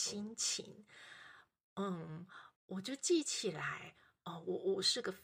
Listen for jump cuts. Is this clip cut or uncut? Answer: cut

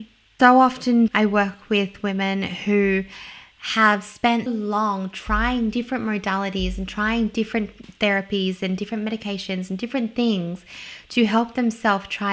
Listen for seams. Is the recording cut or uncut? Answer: cut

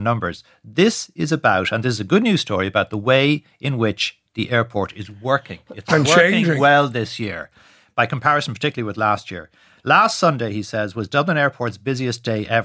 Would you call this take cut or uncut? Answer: uncut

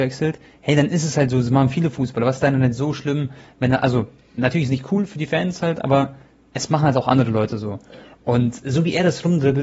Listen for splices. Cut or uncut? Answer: uncut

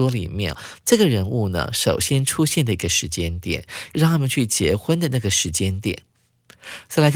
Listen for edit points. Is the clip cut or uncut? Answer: cut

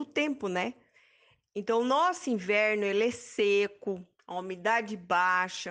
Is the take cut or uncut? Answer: cut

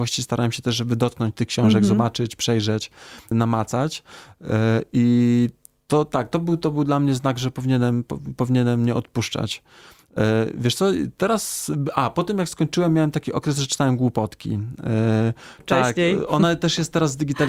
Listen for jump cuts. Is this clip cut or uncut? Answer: cut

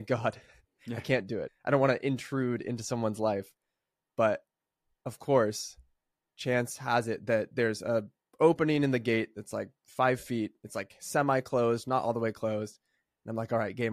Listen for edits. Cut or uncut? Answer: cut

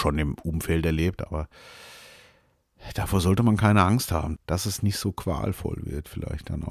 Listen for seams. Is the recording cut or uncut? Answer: cut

